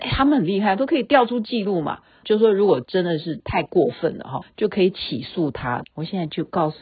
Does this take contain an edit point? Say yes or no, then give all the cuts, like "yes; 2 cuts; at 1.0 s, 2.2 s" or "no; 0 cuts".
yes; 3 cuts; at 2.2 s, 4.4 s, 5.8 s